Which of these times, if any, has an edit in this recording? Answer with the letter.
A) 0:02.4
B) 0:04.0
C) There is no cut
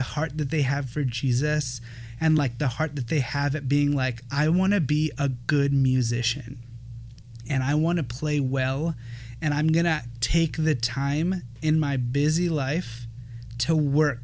C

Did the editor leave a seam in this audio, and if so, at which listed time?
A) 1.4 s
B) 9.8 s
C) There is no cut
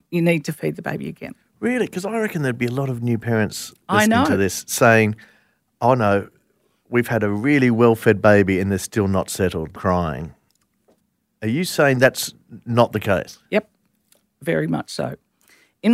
B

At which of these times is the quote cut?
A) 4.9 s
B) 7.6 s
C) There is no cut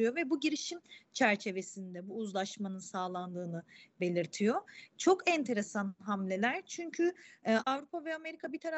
B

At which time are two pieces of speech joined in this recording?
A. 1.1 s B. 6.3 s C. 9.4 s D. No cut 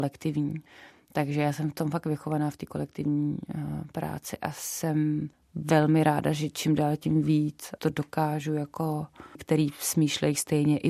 C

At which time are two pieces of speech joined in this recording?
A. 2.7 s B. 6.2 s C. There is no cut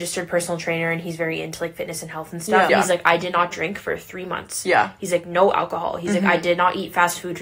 A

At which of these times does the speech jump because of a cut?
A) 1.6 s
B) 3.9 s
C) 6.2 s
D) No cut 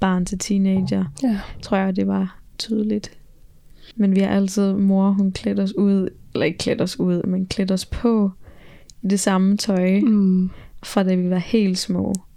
B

